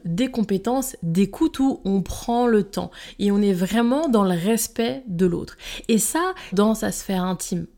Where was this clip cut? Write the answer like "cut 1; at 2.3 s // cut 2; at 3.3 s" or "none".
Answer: cut 1; at 6.5 s